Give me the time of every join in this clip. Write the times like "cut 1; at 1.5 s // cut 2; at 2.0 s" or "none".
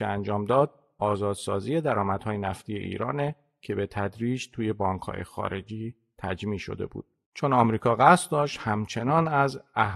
cut 1; at 7.2 s